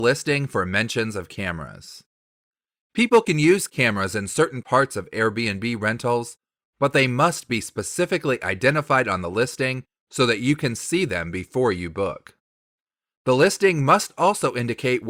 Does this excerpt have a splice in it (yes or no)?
yes